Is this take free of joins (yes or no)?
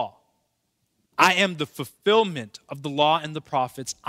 no